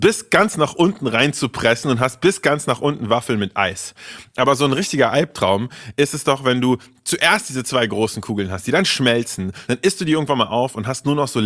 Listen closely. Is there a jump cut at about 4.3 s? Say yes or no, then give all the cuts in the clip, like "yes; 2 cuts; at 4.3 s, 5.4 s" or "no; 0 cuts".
no; 1 cut; at 9.7 s